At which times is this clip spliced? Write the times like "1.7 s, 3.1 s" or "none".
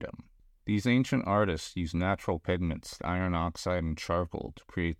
3.0 s

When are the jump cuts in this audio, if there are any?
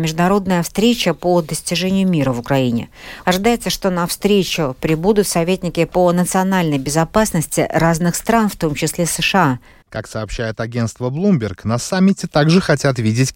3.2 s, 9.8 s

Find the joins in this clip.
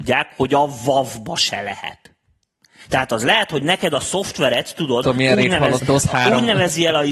5.8 s

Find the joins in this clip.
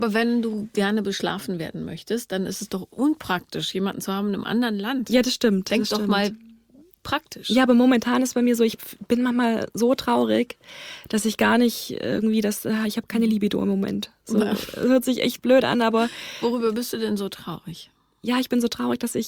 none

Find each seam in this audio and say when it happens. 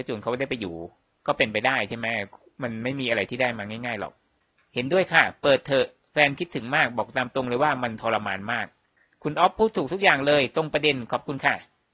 none

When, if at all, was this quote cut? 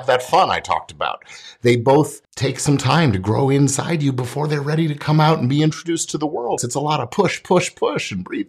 2.2 s, 6.6 s

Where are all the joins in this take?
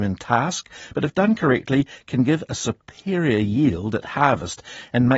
none

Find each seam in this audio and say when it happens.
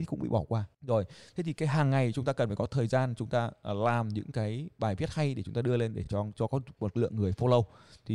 none

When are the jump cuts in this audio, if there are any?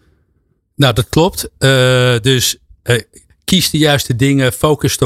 none

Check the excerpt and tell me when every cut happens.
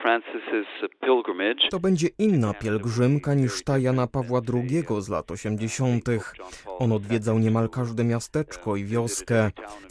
none

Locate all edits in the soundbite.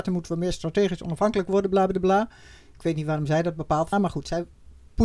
3.9 s

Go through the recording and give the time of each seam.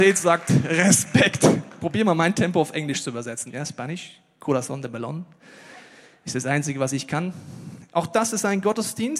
3.5 s, 7.9 s

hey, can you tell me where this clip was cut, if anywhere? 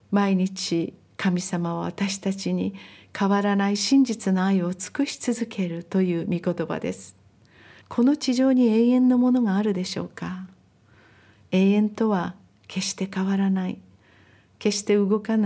7.8 s

